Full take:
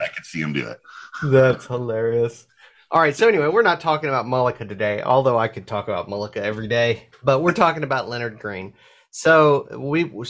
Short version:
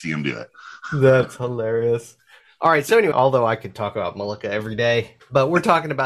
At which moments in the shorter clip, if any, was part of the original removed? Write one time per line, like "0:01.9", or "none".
0:03.1